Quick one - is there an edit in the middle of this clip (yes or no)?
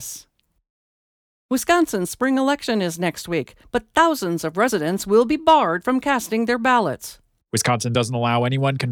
no